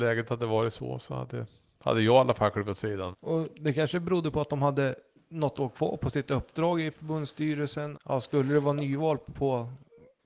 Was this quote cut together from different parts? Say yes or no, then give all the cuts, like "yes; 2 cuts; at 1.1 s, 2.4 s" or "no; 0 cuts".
yes; 2 cuts; at 3.1 s, 7.9 s